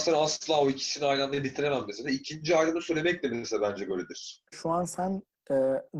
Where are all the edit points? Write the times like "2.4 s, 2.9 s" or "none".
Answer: 4.5 s